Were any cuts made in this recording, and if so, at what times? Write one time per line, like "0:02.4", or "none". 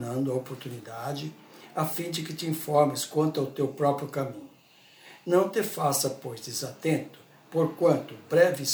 none